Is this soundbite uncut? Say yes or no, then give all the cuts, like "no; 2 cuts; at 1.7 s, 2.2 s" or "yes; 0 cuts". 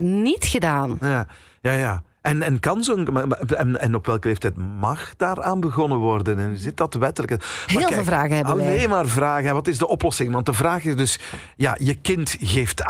yes; 0 cuts